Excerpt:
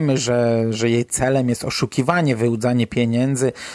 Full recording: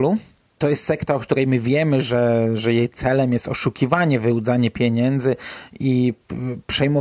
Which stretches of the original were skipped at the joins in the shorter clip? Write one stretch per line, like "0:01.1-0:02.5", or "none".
none